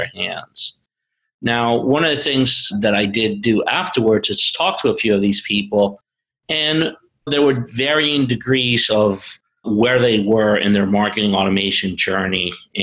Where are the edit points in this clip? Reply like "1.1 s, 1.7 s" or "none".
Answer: 7.3 s